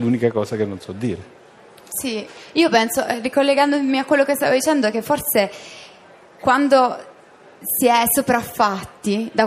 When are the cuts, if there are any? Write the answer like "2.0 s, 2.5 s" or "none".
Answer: none